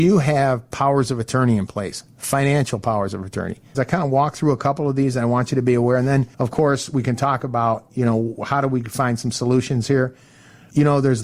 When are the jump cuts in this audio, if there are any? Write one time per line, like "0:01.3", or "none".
0:03.7
0:06.3